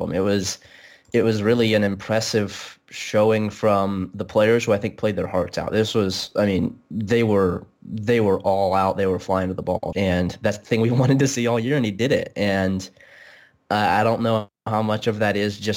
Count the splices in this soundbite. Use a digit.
1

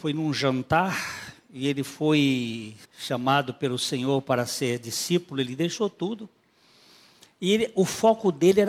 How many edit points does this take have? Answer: 1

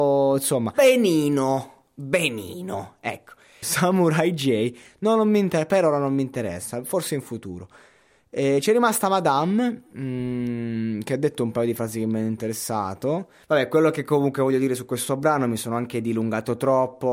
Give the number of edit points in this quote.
2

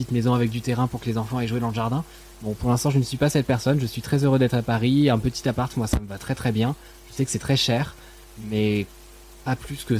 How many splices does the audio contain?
0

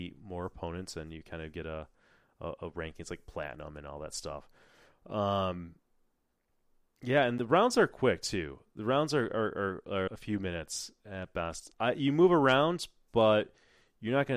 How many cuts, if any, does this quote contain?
2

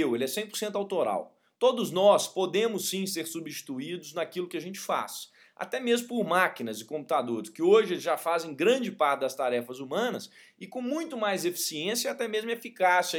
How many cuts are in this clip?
1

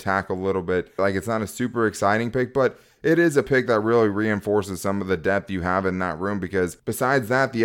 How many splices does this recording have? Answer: 1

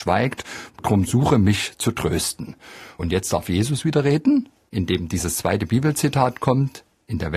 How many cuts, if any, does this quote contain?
0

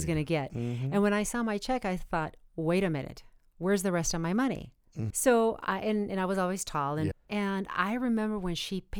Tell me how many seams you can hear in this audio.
2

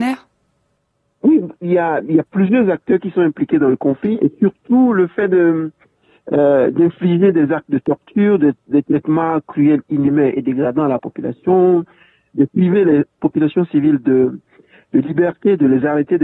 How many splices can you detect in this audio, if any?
1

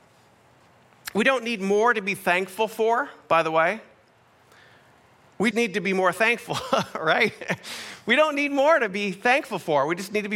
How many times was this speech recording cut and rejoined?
1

